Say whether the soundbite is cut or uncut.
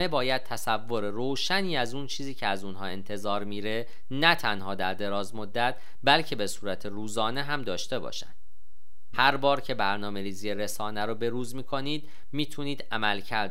cut